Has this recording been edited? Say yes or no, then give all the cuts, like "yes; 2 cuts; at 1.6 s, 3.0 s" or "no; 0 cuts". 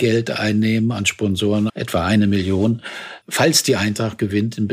yes; 2 cuts; at 1.7 s, 3.2 s